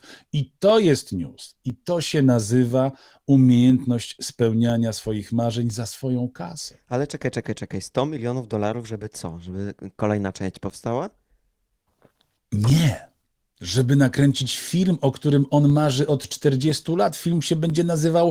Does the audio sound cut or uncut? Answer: uncut